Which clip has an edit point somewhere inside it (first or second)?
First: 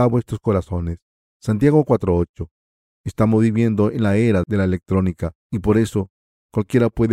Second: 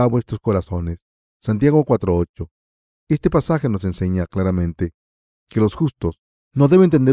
first